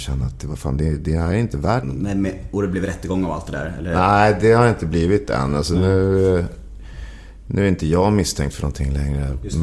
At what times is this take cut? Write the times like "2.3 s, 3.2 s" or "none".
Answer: 1.8 s